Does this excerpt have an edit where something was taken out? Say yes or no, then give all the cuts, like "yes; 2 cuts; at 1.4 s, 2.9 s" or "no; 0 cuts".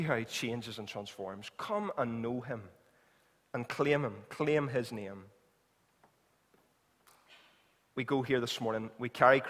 no; 0 cuts